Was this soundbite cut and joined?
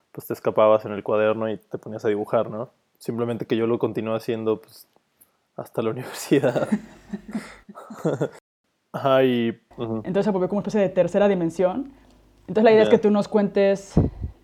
yes; 1 cut; at 9.7 s

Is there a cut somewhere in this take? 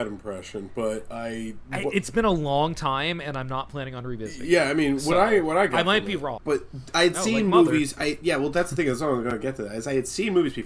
yes; 1 cut; at 6.4 s

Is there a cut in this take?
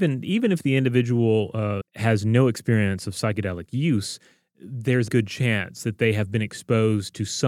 yes; 2 cuts; at 1.8 s, 5.1 s

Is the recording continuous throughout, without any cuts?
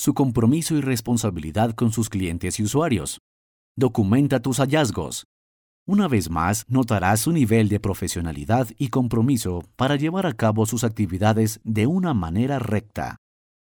no; 2 cuts; at 3.7 s, 5.7 s

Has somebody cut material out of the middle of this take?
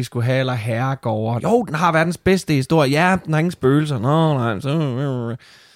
yes; 1 cut; at 1.4 s

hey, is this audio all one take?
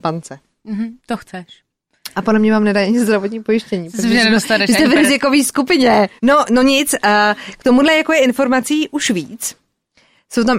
no; 2 cuts; at 1.0 s, 6.2 s

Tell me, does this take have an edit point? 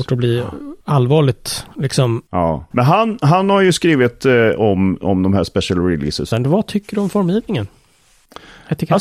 yes; 2 cuts; at 2.7 s, 6.3 s

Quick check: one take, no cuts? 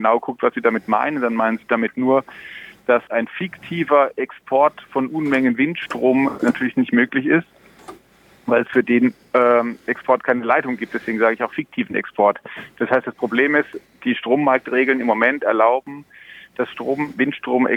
no; 1 cut; at 3.1 s

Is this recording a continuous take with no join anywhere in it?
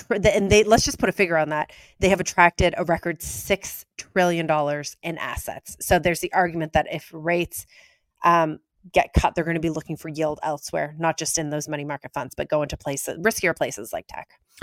yes; 0 cuts

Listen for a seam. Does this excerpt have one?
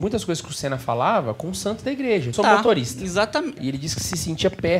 yes; 2 cuts; at 2.3 s, 3.6 s

